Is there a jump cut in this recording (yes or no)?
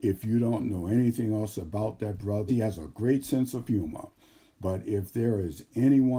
yes